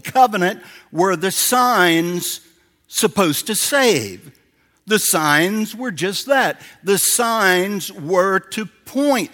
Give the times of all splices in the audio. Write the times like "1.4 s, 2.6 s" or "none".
none